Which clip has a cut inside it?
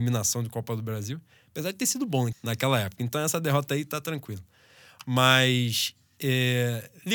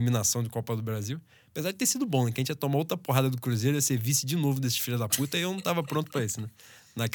first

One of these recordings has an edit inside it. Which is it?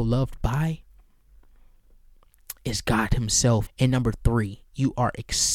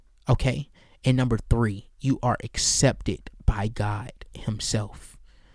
first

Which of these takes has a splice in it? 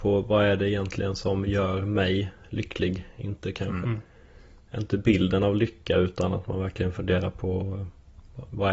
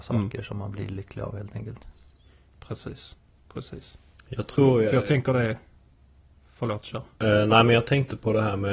first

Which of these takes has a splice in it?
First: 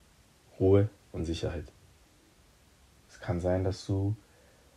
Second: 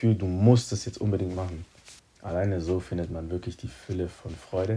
first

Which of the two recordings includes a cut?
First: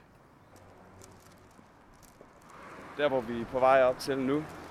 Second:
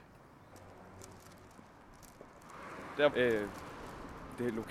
second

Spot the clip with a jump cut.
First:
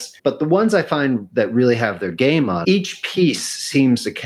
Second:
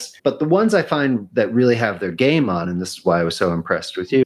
first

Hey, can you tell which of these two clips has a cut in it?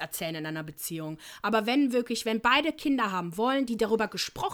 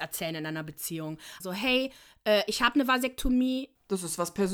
second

